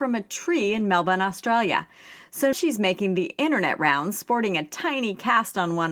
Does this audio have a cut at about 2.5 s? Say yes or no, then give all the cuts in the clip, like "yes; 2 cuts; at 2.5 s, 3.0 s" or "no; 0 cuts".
yes; 1 cut; at 2.5 s